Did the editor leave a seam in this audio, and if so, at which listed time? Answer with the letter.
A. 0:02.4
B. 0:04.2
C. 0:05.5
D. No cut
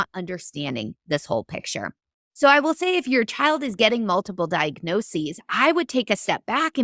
D